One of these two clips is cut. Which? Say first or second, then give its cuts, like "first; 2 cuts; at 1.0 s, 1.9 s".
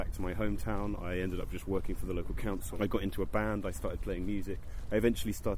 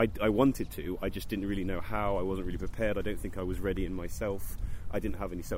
first; 1 cut; at 2.7 s